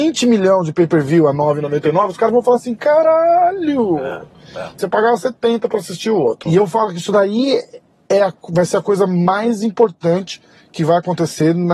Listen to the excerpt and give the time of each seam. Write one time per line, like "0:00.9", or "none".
0:04.8
0:06.5
0:08.1